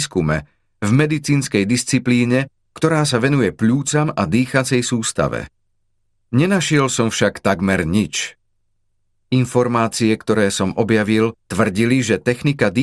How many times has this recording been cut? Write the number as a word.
zero